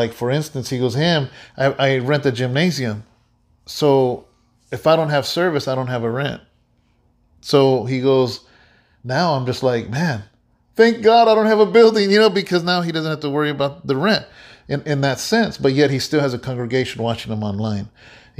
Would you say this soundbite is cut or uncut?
uncut